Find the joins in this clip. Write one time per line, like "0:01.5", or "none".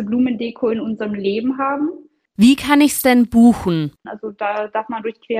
0:02.3
0:04.0